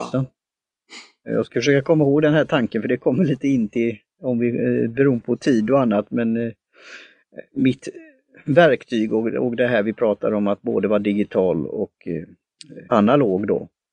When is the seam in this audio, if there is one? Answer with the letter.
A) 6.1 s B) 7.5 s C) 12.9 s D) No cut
C